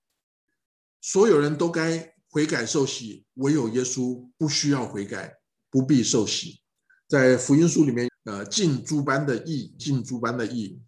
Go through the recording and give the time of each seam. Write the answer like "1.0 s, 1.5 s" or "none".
6.9 s, 8.1 s, 9.8 s